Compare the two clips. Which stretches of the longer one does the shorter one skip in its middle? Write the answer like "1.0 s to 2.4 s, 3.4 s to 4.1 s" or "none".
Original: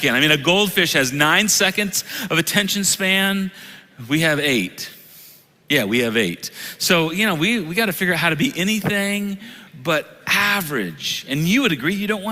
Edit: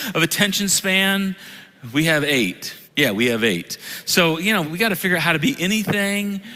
5.0 s to 5.6 s, 7.4 s to 7.6 s

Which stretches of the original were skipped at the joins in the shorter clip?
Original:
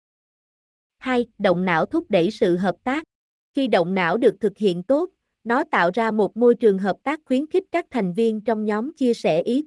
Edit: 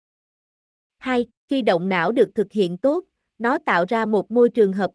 1.3 s to 3.3 s

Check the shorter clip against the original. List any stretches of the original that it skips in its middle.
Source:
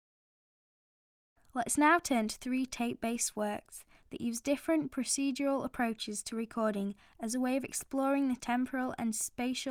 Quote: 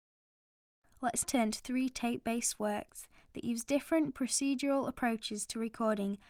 1.8 s to 2.0 s

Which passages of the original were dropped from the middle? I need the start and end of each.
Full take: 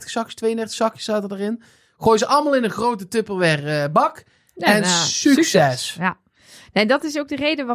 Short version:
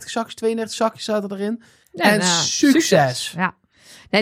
1.8 s to 4.5 s

